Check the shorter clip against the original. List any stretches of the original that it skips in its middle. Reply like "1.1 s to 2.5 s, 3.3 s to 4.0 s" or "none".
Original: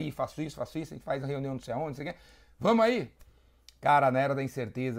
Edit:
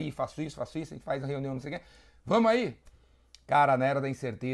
1.6 s to 1.9 s